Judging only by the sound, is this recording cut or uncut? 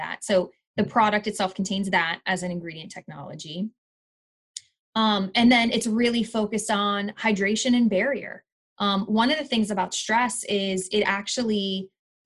uncut